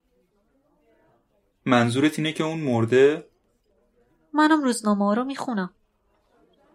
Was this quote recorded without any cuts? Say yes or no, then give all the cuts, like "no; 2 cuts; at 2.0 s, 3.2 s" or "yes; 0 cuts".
yes; 0 cuts